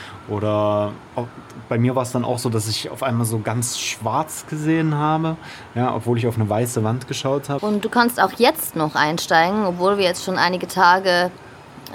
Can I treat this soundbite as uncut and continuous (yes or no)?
no